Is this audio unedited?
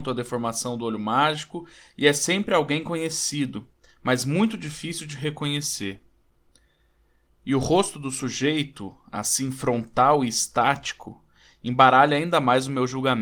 yes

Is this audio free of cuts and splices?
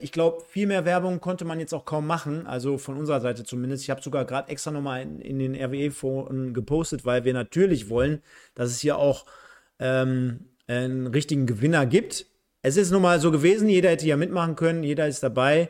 yes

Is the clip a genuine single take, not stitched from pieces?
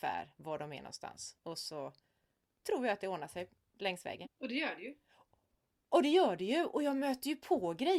no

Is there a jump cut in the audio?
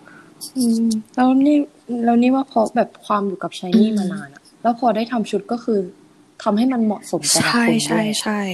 yes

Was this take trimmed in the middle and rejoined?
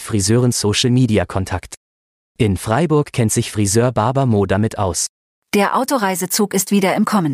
no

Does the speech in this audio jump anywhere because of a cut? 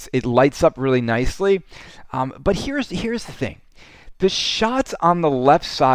no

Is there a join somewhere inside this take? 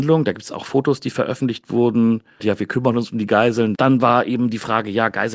yes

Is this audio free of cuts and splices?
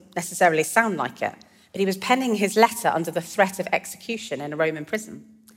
yes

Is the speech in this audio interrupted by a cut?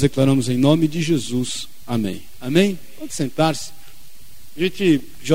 no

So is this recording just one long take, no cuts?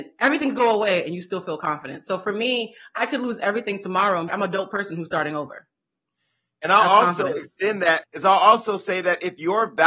no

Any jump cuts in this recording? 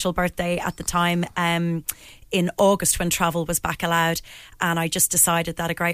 no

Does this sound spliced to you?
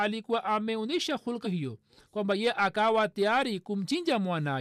yes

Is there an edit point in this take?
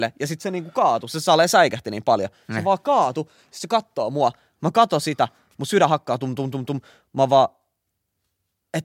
no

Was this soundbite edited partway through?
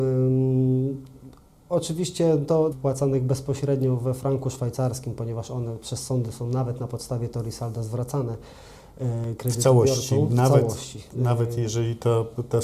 yes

